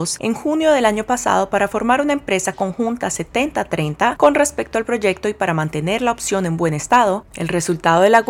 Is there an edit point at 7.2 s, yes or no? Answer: yes